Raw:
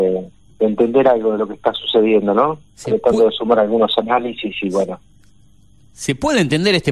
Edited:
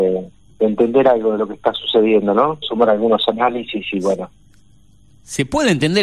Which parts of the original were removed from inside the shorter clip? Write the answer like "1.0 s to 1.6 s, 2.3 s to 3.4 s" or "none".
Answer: 2.6 s to 3.3 s